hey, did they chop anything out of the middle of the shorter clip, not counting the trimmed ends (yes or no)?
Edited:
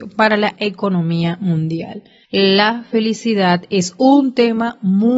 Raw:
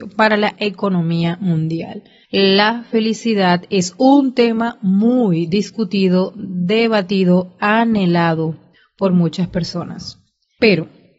no